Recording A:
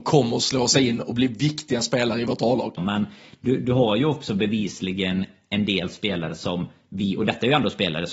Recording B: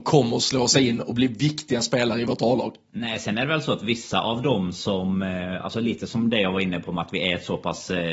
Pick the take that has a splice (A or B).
A